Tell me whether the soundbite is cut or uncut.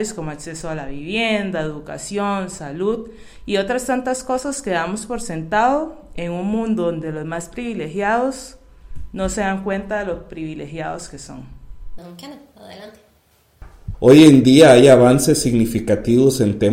cut